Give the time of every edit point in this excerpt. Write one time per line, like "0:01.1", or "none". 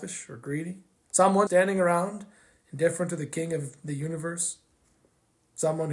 0:01.5